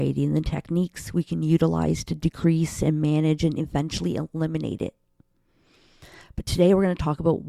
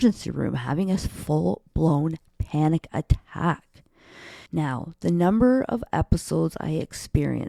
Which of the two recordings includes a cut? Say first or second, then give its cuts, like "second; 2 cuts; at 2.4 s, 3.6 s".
second; 1 cut; at 4.5 s